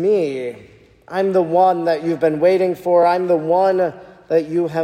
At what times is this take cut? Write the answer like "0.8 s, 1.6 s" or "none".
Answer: none